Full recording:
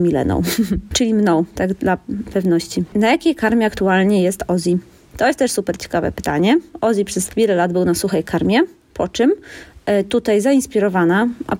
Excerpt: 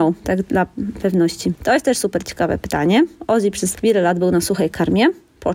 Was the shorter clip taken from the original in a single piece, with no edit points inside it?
no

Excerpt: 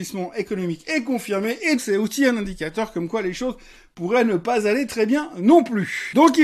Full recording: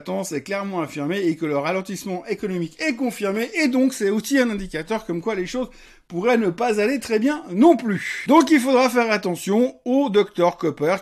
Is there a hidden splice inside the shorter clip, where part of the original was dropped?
yes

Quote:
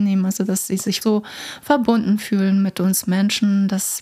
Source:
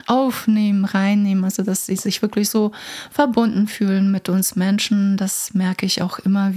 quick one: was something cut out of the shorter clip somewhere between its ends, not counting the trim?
yes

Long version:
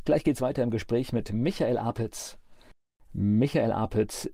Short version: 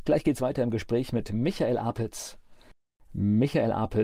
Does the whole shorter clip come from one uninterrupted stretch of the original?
yes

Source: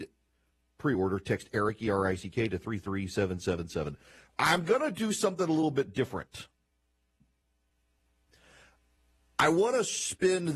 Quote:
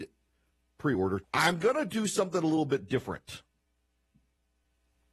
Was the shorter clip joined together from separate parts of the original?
yes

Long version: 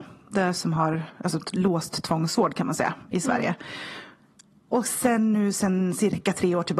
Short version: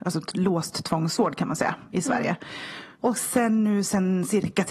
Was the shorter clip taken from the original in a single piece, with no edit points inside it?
no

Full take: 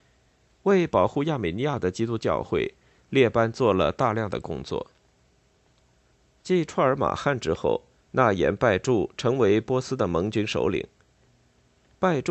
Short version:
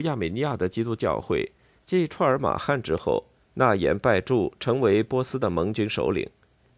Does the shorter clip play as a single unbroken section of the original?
no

